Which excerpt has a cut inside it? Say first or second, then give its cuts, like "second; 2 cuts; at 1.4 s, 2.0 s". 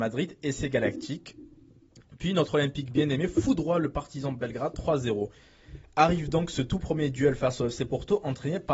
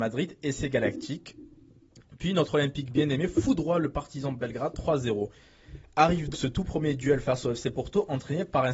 second; 1 cut; at 6.3 s